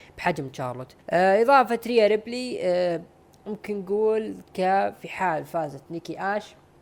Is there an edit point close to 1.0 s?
yes; 1 cut; at 1.0 s

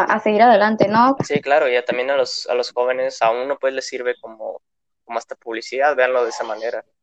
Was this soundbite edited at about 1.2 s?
yes; 1 cut; at 1.2 s

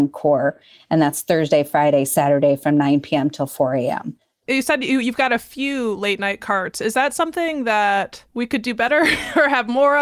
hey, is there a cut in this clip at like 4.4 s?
yes; 2 cuts; at 4.4 s, 8.3 s

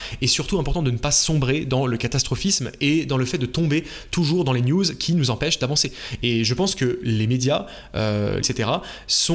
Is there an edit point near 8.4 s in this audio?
yes; 1 cut; at 8.4 s

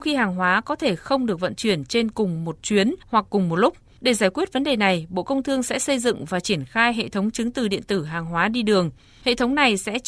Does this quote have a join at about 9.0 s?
no; 0 cuts

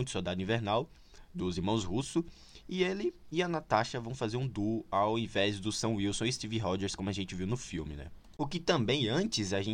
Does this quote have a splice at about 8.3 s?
no; 0 cuts

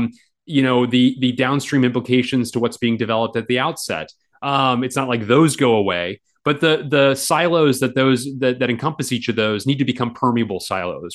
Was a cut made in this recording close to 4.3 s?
yes; 1 cut; at 4.3 s

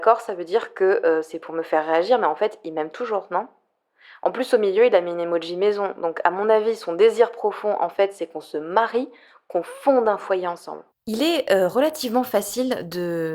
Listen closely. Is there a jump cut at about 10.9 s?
yes; 1 cut; at 10.9 s

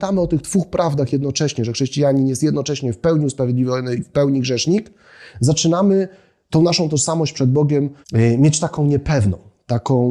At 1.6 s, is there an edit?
no; 1 cut; at 8.0 s

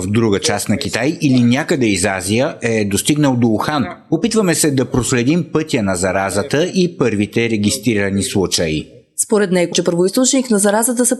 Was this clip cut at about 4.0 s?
no; 1 cut; at 9.7 s

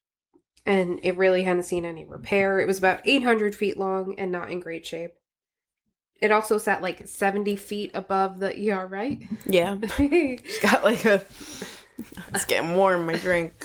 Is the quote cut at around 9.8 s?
no; 0 cuts

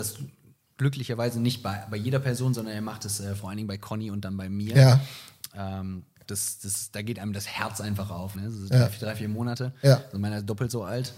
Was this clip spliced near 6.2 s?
yes; 2 cuts; at 6.2 s, 8.3 s

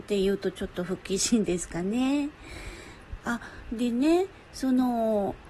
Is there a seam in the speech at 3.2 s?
yes; 1 cut; at 3.2 s

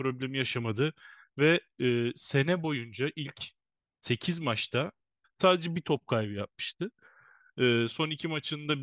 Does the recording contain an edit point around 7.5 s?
no; 1 cut; at 5.2 s

